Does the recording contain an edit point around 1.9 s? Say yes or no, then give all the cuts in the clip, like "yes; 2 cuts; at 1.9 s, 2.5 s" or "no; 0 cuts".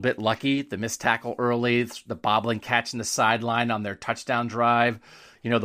no; 0 cuts